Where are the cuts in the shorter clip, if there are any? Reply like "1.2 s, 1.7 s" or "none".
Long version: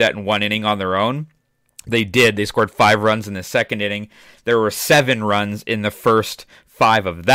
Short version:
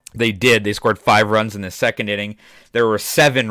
none